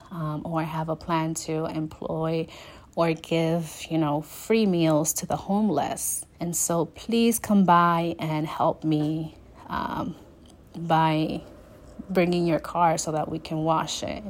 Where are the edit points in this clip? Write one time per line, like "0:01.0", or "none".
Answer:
0:06.3

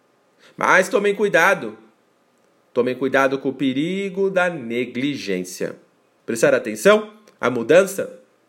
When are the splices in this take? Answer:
0:06.2

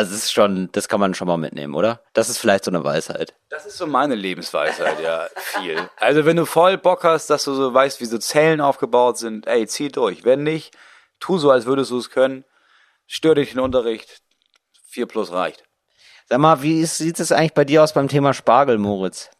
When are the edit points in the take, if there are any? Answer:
0:02.1

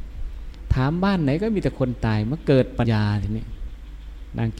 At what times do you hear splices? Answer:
0:02.8

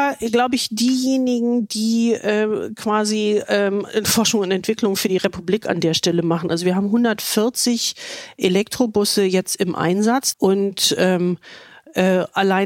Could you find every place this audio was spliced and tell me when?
0:10.3

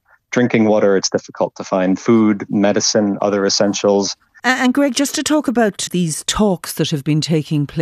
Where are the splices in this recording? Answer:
0:04.4
0:05.9

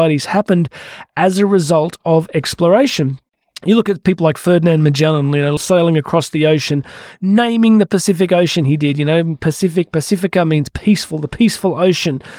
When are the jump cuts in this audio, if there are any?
0:05.6

